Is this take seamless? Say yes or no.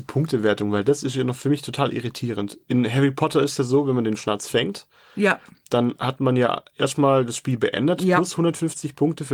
yes